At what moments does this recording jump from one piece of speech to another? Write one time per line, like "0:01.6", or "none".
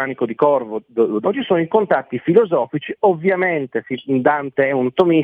0:01.2

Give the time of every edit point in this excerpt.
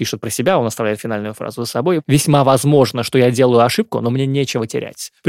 none

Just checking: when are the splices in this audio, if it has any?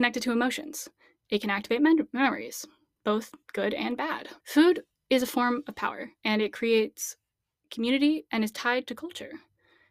0:04.4
0:06.2

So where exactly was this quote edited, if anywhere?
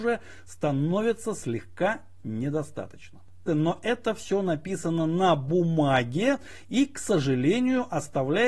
0:03.5

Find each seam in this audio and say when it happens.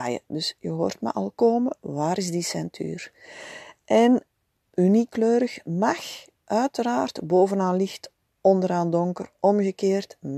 none

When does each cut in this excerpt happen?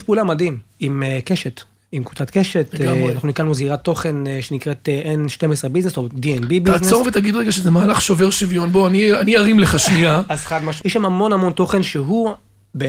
0:10.8

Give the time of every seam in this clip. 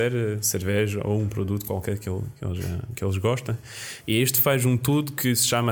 0:04.0

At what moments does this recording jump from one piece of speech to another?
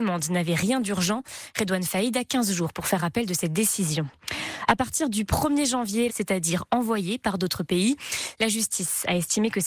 0:06.1
0:08.3

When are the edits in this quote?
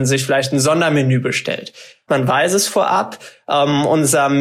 0:02.1

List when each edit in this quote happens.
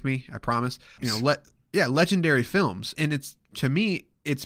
0:01.0
0:03.0

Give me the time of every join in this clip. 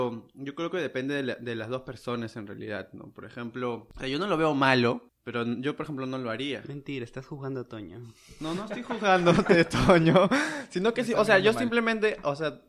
none

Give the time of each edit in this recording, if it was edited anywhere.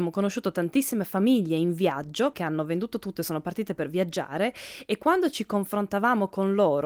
0:02.3

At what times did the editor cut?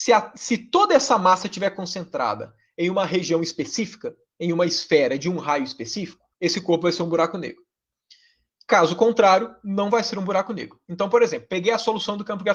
0:06.3

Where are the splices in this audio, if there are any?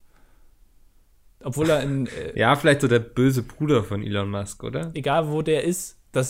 0:04.9

